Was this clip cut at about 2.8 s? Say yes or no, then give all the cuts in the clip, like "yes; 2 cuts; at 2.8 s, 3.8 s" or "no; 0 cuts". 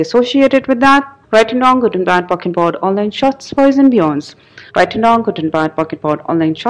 no; 2 cuts; at 1.2 s, 4.7 s